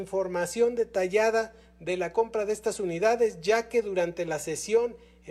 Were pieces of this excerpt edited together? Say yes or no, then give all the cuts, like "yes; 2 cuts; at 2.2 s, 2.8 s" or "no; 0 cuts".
no; 0 cuts